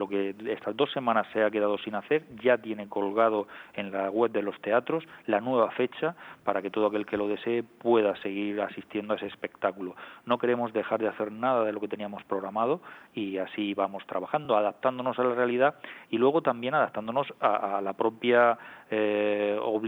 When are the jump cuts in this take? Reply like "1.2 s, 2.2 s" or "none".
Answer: none